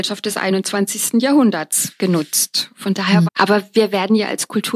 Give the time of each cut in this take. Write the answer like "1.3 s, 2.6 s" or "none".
3.3 s